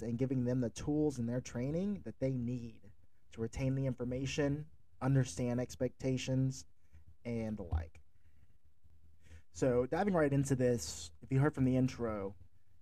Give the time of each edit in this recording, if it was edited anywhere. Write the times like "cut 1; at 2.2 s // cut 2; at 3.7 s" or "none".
cut 1; at 11.2 s